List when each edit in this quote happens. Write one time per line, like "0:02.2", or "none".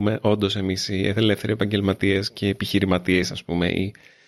none